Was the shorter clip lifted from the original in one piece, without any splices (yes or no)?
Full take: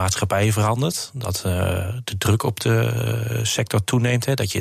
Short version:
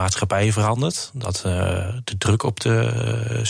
yes